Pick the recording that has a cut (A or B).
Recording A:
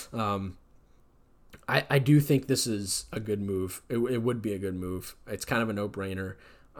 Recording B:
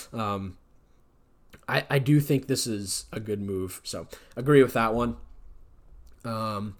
B